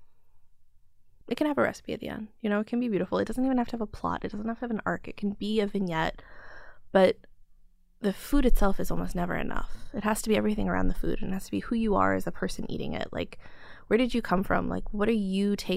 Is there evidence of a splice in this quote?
no; 0 cuts

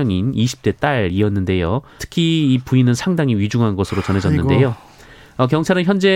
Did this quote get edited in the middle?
yes; 1 cut; at 2.0 s

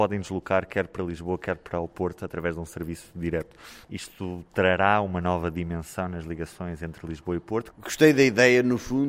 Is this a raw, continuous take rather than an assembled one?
no; 2 cuts; at 3.8 s, 7.7 s

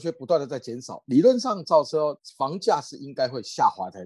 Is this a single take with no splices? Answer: yes; 0 cuts

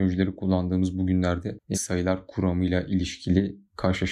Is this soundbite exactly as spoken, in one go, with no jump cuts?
no; 1 cut; at 1.7 s

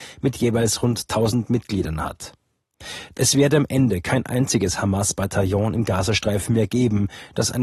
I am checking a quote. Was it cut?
yes; 1 cut; at 3.1 s

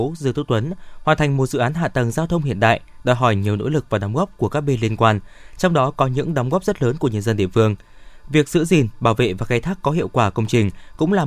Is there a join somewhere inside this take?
no; 0 cuts

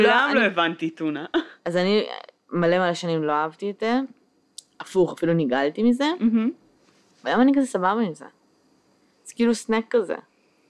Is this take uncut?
yes; 0 cuts

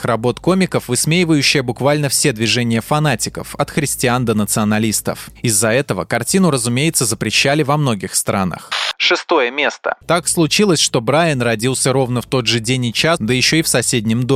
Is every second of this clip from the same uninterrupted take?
no; 2 cuts; at 10.0 s, 13.2 s

